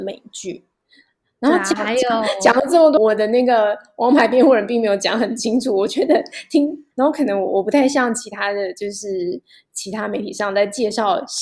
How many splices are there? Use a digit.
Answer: 2